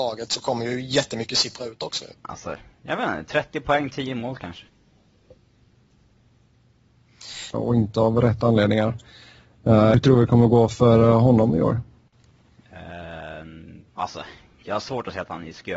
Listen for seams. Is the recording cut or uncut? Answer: cut